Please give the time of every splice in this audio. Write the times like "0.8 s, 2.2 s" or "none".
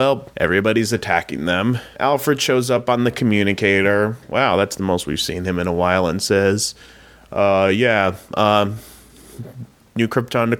none